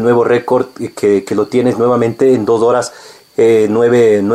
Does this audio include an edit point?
no; 0 cuts

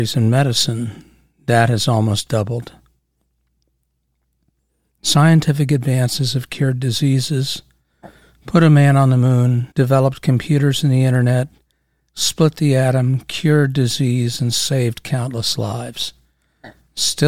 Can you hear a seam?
yes; 1 cut; at 9.7 s

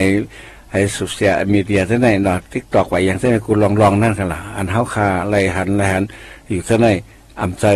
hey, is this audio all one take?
yes; 0 cuts

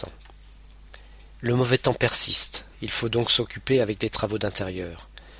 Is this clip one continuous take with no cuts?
no; 2 cuts; at 1.4 s, 2.7 s

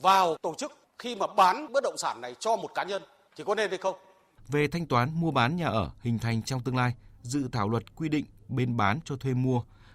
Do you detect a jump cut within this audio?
yes; 1 cut; at 4.4 s

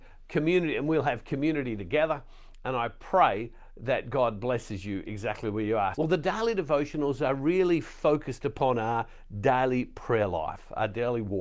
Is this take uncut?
no; 1 cut; at 5.9 s

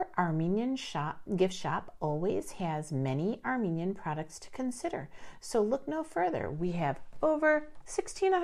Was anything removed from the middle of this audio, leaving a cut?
no; 0 cuts

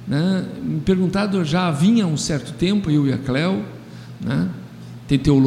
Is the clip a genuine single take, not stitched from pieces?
no; 2 cuts; at 2.9 s, 4.2 s

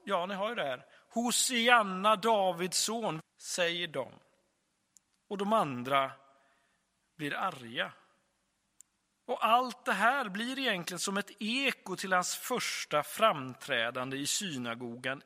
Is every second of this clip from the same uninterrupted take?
no; 2 cuts; at 3.2 s, 9.2 s

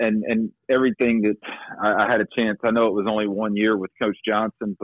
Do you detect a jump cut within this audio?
no; 0 cuts

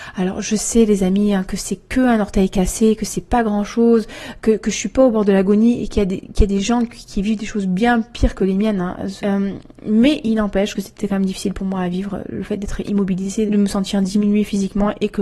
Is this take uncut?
no; 2 cuts; at 9.2 s, 13.5 s

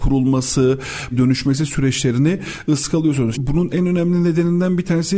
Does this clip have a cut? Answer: yes; 2 cuts; at 1.1 s, 3.3 s

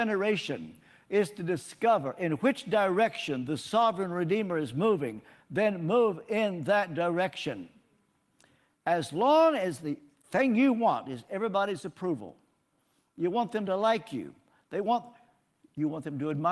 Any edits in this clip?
yes; 1 cut; at 8.7 s

